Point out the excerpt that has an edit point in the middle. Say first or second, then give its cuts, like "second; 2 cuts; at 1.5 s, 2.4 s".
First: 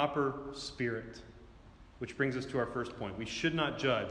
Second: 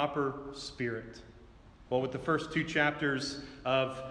second; 1 cut; at 1.9 s